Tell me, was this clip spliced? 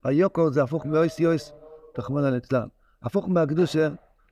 yes; 1 cut; at 1.9 s

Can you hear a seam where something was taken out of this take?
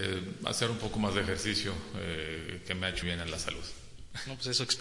yes; 1 cut; at 3.0 s

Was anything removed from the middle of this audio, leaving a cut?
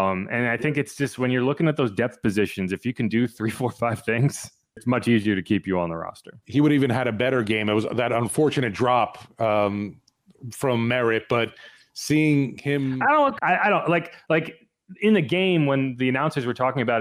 yes; 1 cut; at 13.4 s

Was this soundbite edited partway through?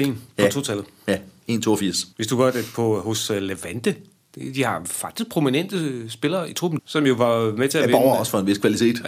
yes; 2 cuts; at 2.1 s, 6.8 s

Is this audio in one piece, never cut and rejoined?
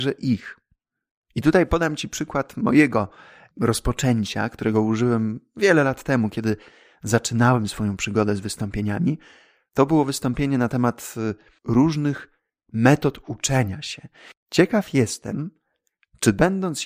no; 1 cut; at 14.3 s

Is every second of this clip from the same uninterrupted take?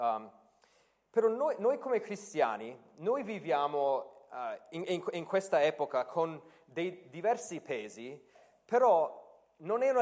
yes; 0 cuts

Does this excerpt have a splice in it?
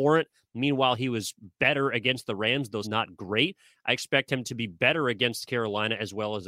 yes; 1 cut; at 2.8 s

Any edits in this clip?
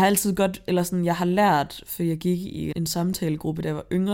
yes; 1 cut; at 2.7 s

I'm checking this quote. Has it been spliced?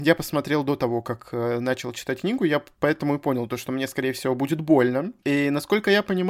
yes; 1 cut; at 5.2 s

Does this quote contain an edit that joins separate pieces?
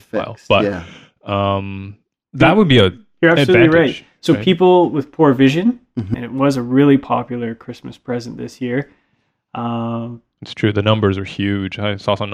yes; 1 cut; at 6.1 s

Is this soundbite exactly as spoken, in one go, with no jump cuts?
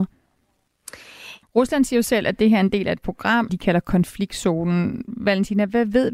no; 2 cuts; at 1.4 s, 3.5 s

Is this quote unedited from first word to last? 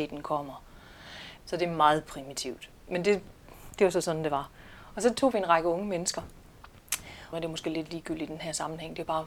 no; 2 cuts; at 1.4 s, 7.3 s

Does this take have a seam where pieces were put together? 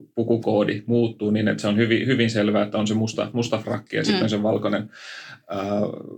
no; 0 cuts

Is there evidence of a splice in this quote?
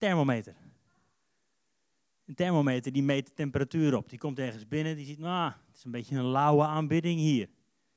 no; 0 cuts

